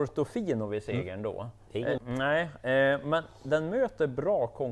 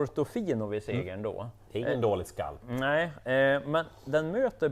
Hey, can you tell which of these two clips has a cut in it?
first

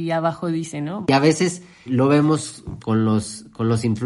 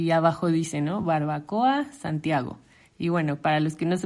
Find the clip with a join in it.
first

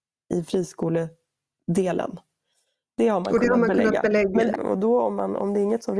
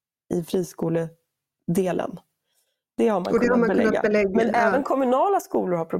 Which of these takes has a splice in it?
first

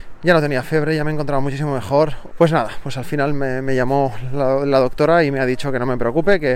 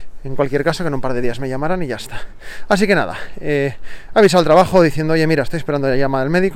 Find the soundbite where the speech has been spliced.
first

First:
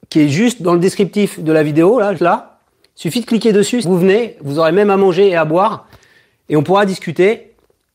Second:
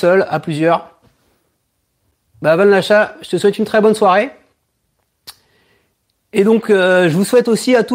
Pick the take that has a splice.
first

